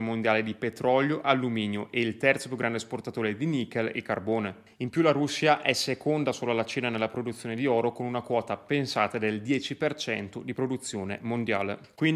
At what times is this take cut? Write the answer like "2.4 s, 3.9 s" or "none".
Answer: none